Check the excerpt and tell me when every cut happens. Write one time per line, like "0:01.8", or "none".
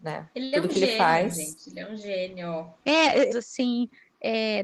0:03.3